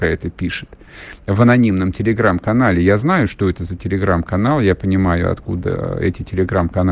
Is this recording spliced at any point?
no; 0 cuts

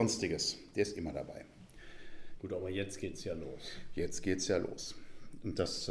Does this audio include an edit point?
yes; 1 cut; at 2.4 s

